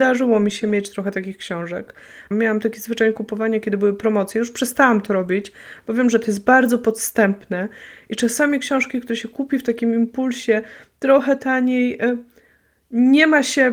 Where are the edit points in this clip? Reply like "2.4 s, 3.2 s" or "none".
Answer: 2.3 s